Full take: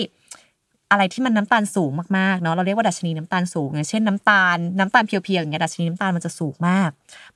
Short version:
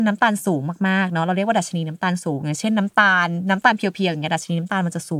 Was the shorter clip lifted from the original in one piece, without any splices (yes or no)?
yes